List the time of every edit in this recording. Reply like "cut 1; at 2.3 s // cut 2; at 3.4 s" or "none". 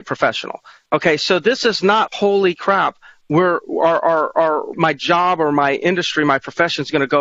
cut 1; at 2.1 s // cut 2; at 4.7 s